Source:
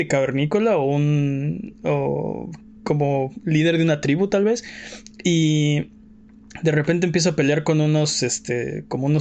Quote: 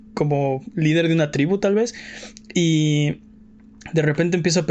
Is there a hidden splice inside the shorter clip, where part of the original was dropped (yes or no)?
no